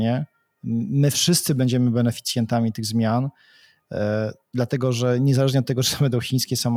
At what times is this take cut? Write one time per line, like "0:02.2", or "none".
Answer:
none